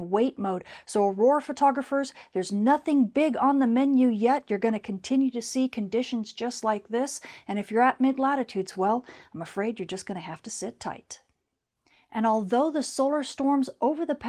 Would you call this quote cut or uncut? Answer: uncut